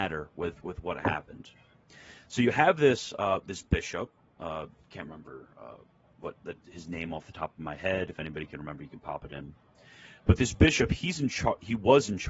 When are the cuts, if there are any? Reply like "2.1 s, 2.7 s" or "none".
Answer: none

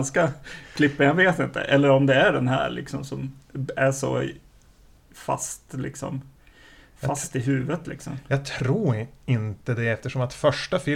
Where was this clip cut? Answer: none

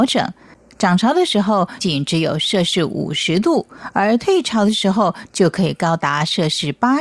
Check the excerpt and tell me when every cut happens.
1.8 s

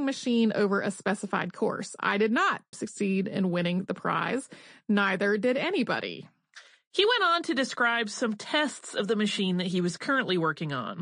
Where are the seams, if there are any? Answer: 2.7 s

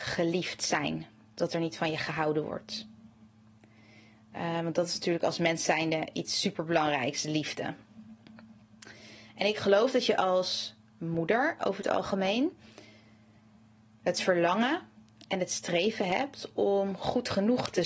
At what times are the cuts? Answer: none

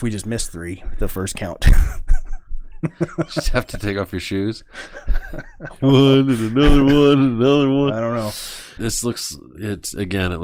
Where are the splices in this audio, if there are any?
8.8 s

